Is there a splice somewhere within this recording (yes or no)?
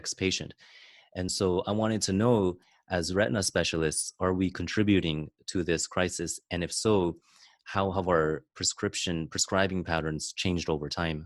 no